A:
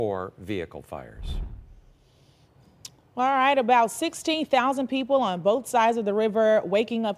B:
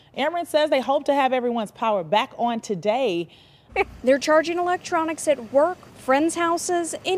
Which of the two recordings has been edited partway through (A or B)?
B